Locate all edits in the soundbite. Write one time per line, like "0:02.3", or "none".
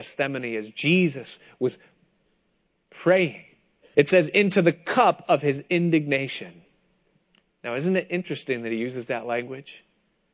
0:03.9